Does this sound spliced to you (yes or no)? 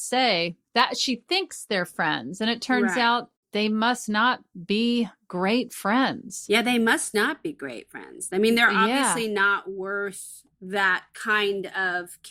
no